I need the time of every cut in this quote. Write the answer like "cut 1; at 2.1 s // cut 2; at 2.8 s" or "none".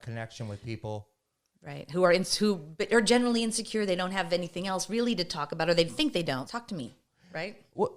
cut 1; at 6.5 s